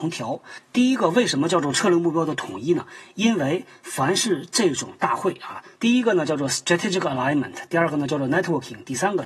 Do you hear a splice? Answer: yes; 1 cut; at 5.8 s

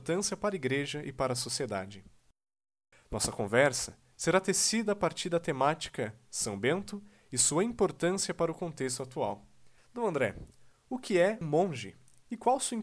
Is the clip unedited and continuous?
no; 3 cuts; at 2.9 s, 9.8 s, 11.4 s

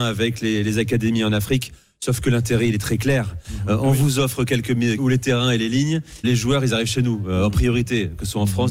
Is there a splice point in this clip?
yes; 2 cuts; at 5.0 s, 6.2 s

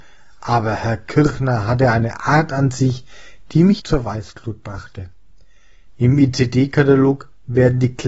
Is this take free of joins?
no; 2 cuts; at 3.8 s, 5.9 s

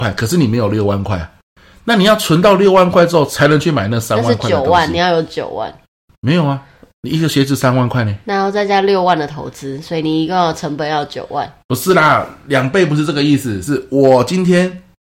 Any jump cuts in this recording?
no; 0 cuts

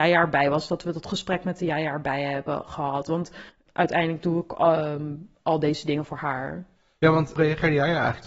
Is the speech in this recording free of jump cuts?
yes; 0 cuts

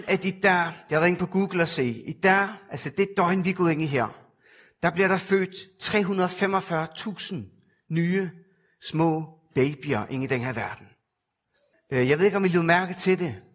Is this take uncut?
no; 1 cut; at 11.7 s

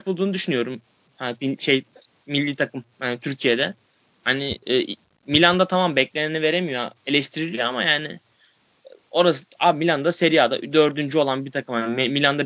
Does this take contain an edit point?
no; 0 cuts

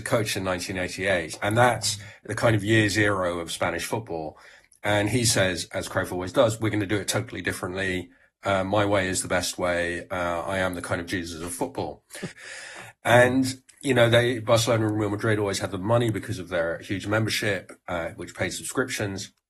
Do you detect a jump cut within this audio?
yes; 1 cut; at 12.3 s

